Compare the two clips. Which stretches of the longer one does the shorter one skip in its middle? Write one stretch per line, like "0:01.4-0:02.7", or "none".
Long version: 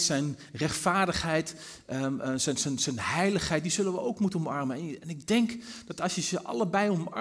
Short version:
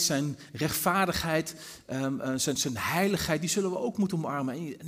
0:02.6-0:02.8